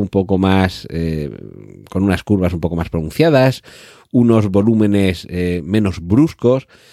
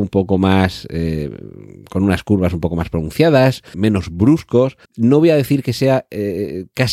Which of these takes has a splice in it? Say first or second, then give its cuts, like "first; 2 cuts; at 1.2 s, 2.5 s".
second; 2 cuts; at 3.7 s, 4.9 s